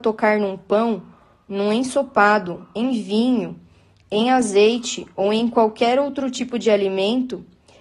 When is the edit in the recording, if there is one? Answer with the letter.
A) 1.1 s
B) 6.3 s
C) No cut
C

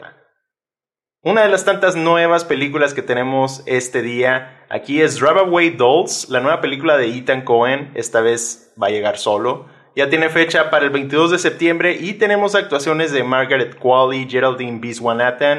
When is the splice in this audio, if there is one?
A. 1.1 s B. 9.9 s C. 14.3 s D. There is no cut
D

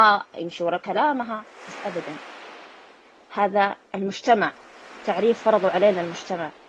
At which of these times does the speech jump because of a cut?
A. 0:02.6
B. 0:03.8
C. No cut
B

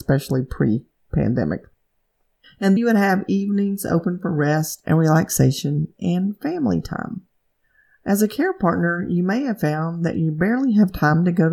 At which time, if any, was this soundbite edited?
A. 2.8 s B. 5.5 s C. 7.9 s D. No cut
A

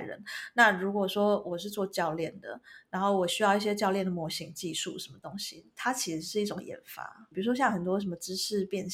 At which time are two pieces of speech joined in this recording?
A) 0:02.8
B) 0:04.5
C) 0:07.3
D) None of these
C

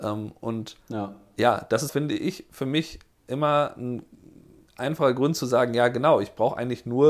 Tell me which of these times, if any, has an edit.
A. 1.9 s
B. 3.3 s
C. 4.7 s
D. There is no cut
A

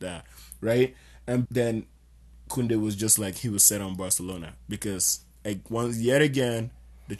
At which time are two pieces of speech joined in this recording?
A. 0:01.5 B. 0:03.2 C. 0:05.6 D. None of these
A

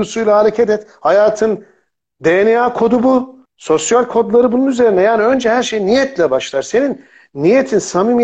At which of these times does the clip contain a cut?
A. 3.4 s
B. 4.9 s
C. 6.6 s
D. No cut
A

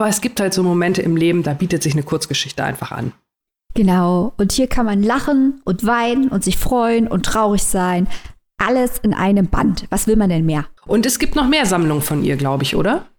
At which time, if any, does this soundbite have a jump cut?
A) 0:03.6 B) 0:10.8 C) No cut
B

